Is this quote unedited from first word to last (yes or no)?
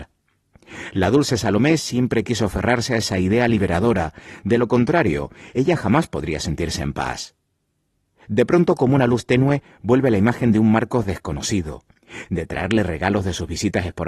no